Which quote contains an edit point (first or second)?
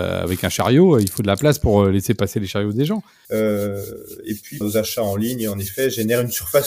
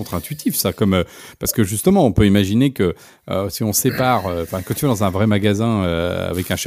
first